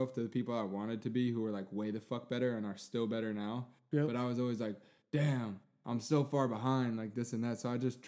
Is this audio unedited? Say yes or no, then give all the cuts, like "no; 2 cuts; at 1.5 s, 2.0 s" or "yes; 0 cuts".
yes; 0 cuts